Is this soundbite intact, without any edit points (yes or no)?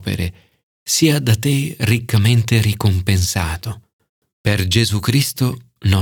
yes